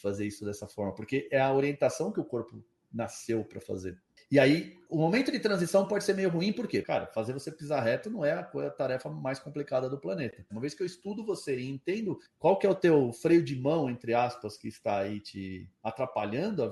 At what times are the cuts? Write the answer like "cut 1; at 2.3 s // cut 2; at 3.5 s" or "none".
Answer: cut 1; at 6.8 s // cut 2; at 10.5 s